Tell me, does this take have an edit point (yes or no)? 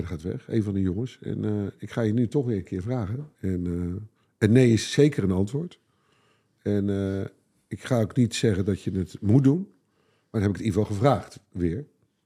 yes